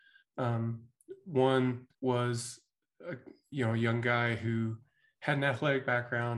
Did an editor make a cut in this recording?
yes; 1 cut; at 1.9 s

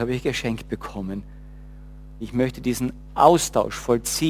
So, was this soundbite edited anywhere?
yes; 1 cut; at 2.2 s

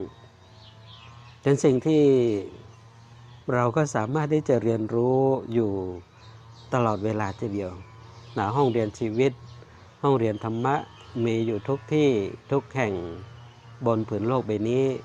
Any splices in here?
yes; 1 cut; at 3.4 s

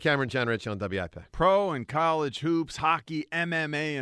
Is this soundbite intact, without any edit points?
yes; 0 cuts

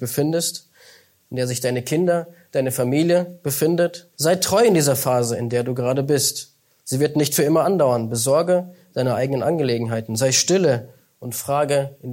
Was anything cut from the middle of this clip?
yes; 1 cut; at 4.1 s

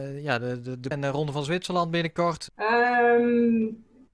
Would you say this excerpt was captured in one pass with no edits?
no; 2 cuts; at 0.9 s, 2.5 s

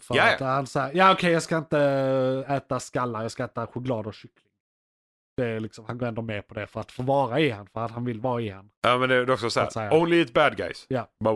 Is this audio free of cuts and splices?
yes; 0 cuts

